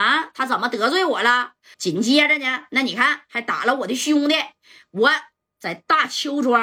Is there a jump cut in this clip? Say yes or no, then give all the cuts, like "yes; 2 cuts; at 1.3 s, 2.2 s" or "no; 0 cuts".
yes; 1 cut; at 1.7 s